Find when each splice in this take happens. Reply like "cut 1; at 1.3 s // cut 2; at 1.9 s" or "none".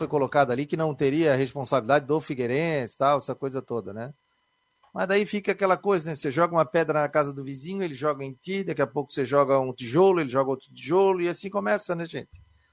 none